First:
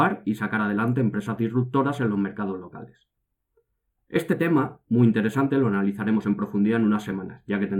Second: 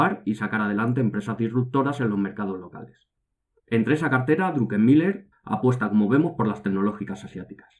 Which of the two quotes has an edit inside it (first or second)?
second